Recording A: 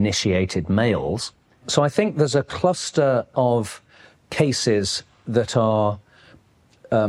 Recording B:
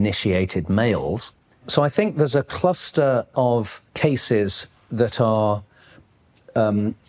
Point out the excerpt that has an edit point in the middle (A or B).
B